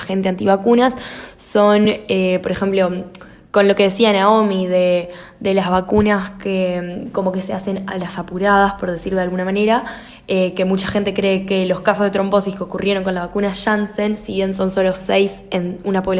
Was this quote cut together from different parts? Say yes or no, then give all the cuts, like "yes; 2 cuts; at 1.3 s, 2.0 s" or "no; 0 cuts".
no; 0 cuts